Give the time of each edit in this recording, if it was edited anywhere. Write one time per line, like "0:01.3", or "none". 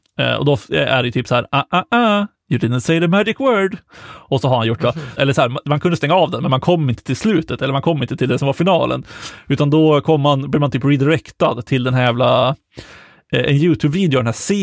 0:05.2